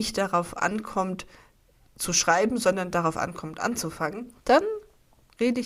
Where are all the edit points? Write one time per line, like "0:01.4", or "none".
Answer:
0:04.4